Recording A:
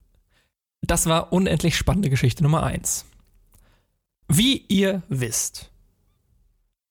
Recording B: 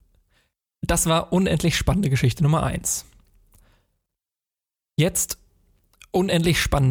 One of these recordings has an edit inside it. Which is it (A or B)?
A